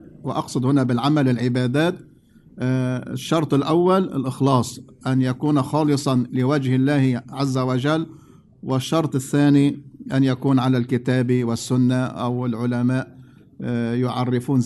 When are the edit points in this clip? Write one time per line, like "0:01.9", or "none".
none